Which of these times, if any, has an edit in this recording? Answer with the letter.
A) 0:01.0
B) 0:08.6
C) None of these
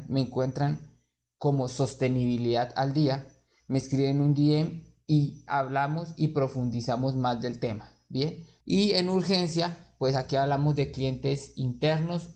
B